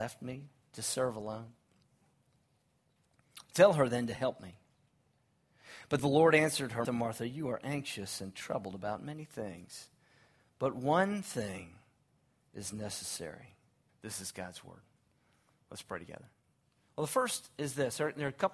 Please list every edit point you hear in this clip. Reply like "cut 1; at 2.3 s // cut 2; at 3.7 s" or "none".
cut 1; at 6.8 s // cut 2; at 13.9 s // cut 3; at 16.9 s